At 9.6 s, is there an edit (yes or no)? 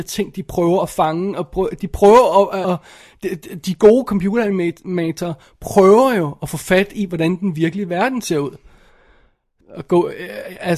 yes